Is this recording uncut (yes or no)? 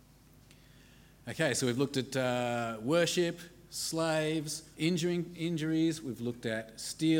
no